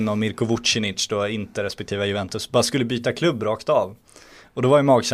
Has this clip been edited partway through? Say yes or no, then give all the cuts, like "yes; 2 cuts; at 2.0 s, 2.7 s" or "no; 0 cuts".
no; 0 cuts